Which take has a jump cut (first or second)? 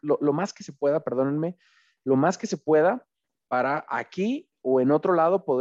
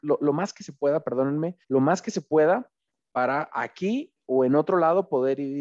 second